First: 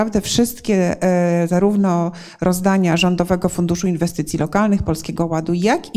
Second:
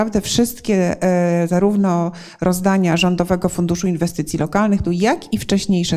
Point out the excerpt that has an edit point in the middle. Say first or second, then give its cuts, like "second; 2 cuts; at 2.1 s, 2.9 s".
second; 1 cut; at 4.8 s